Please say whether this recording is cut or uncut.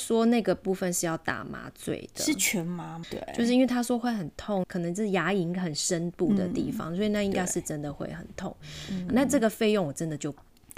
cut